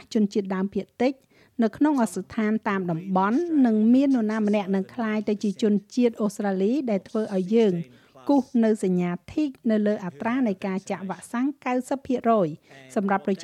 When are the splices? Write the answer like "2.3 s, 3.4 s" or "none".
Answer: 2.1 s